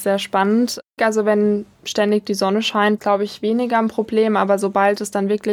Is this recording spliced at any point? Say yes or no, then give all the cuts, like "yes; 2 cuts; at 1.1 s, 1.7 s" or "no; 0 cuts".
yes; 2 cuts; at 1.0 s, 3.0 s